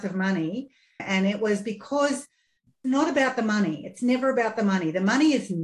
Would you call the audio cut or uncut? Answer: cut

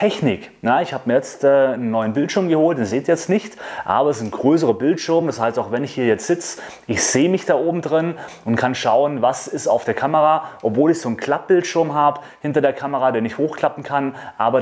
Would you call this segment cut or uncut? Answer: uncut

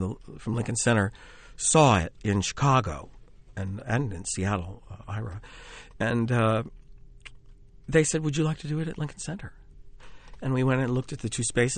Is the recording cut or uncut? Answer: cut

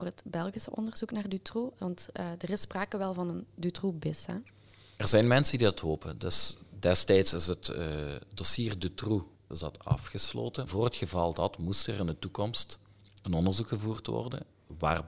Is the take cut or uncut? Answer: cut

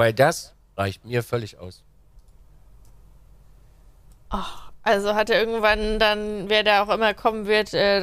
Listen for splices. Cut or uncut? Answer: uncut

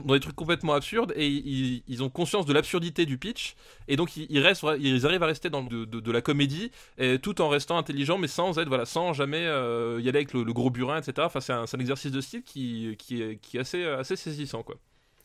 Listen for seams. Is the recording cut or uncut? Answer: cut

